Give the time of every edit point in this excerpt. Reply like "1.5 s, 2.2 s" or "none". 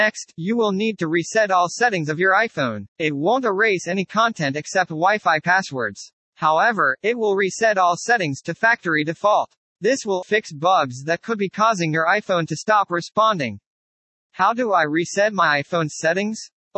2.9 s, 10.2 s, 14.1 s

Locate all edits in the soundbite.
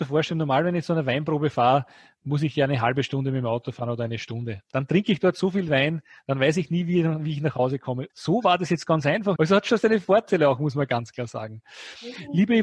8.1 s, 9.4 s

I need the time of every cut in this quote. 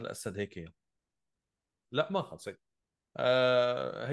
1.9 s

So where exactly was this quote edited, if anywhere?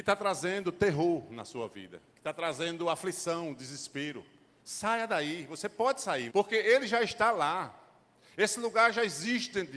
6.3 s

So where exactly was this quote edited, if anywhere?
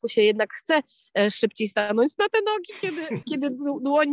3.2 s

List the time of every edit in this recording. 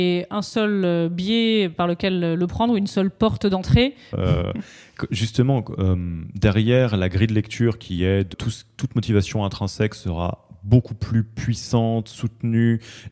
4.1 s, 8.3 s

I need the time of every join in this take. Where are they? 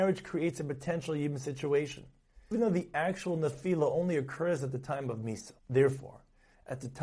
2.5 s, 5.6 s

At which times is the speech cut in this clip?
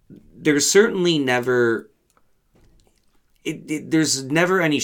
none

